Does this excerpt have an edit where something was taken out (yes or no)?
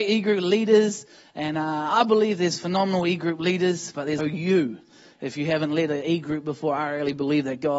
yes